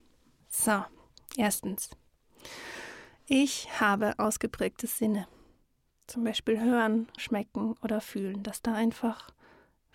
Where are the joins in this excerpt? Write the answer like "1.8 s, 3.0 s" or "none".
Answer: 7.2 s